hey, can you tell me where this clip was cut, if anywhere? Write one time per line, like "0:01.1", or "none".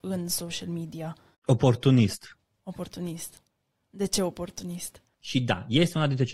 0:05.2